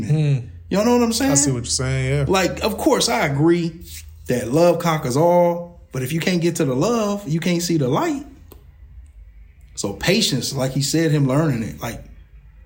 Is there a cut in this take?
no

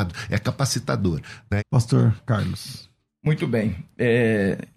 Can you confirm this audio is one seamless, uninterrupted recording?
no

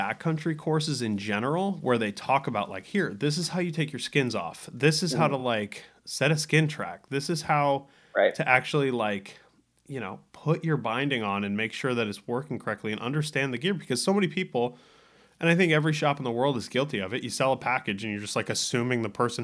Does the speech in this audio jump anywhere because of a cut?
no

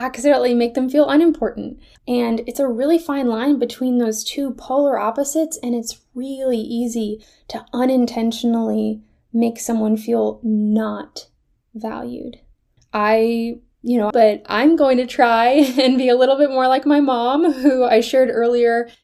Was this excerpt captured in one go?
no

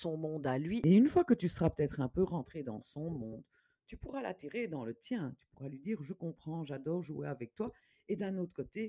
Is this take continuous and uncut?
yes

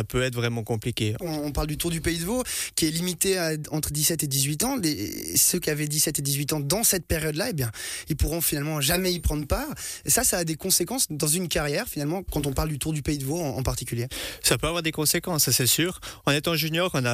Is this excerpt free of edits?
no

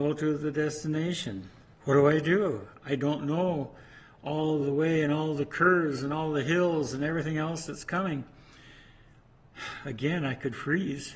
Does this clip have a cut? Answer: yes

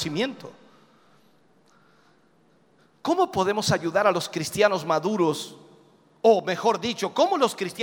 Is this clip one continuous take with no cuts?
yes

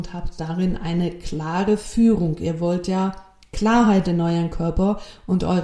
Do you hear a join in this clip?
no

